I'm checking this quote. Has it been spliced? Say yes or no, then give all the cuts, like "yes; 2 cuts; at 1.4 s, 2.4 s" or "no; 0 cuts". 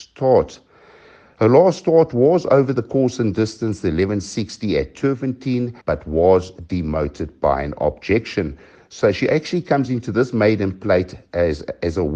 yes; 1 cut; at 5.8 s